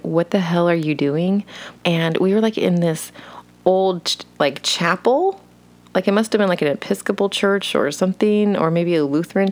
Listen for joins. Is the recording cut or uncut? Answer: cut